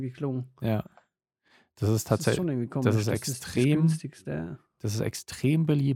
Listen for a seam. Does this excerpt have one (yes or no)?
no